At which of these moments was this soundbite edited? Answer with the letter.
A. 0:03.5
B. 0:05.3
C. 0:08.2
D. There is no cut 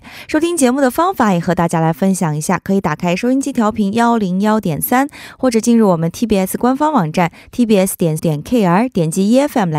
C